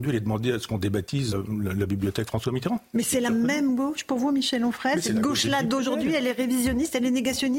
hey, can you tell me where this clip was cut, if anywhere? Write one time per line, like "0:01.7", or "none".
0:01.3